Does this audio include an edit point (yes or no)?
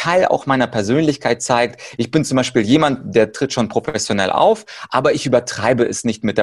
no